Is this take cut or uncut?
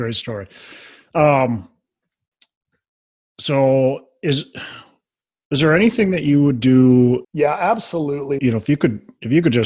cut